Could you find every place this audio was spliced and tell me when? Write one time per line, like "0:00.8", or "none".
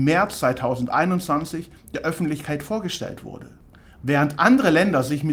none